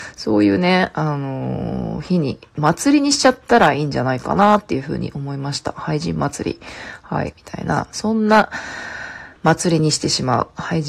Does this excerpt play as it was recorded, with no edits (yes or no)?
no